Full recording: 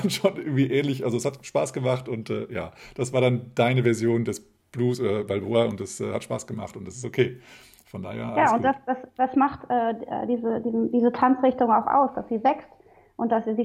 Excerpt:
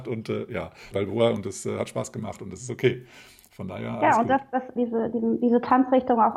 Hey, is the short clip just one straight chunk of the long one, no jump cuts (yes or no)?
no